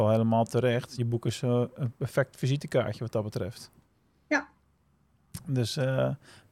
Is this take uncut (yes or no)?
yes